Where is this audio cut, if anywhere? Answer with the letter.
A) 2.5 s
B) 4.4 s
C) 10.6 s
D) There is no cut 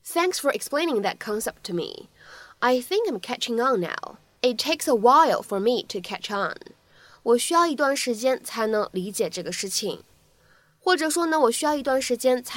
B